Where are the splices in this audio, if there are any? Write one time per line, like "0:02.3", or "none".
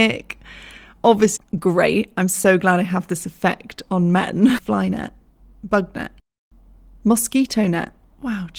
0:01.4
0:04.6